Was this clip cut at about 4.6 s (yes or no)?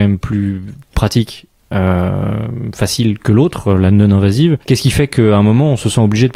yes